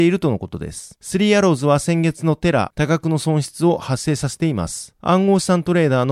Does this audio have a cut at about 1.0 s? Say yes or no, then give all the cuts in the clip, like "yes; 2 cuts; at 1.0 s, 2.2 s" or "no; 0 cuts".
yes; 2 cuts; at 1.0 s, 2.7 s